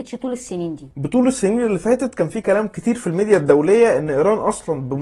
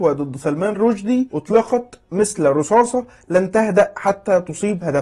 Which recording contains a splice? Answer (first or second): first